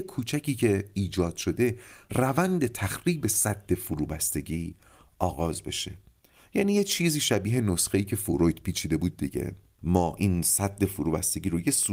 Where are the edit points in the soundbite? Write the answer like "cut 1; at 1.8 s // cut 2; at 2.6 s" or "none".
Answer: none